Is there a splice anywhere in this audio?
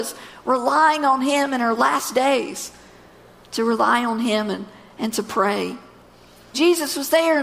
yes; 1 cut; at 6.5 s

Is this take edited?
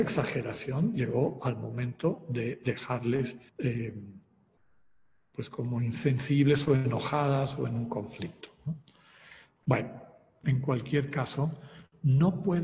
yes; 2 cuts; at 3.5 s, 10.4 s

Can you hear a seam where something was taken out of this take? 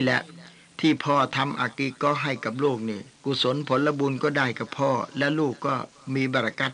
yes; 1 cut; at 3.1 s

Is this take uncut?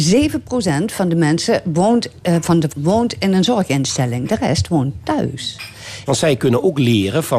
no; 2 cuts; at 2.7 s, 6.1 s

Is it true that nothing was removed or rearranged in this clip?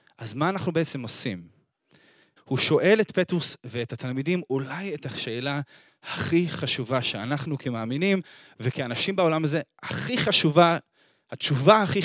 no; 1 cut; at 2.4 s

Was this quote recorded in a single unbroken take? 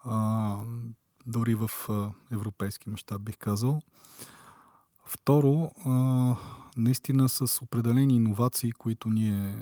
yes; 0 cuts

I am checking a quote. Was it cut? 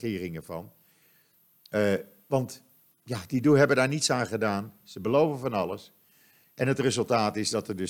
no; 0 cuts

